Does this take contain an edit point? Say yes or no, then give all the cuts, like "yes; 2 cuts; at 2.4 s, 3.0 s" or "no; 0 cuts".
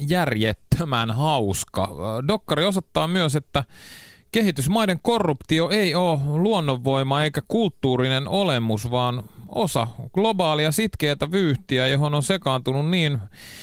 no; 0 cuts